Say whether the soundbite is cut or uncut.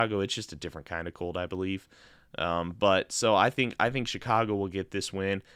uncut